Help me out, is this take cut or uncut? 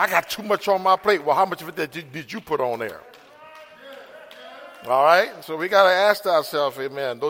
uncut